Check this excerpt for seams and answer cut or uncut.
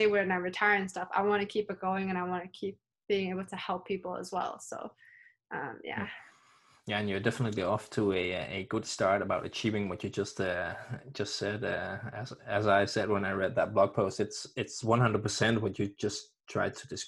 uncut